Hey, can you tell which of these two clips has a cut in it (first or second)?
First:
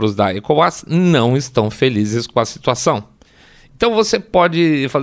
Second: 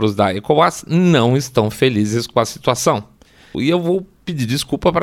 second